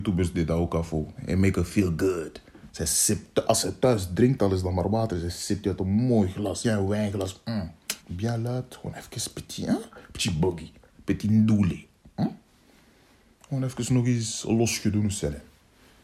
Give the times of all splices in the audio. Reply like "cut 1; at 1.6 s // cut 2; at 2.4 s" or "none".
cut 1; at 6.6 s // cut 2; at 8.0 s